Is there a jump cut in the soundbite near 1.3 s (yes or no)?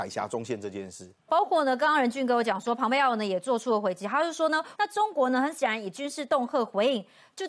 yes